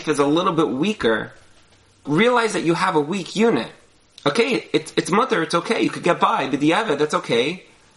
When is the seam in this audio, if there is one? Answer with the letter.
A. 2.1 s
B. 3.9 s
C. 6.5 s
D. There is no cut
A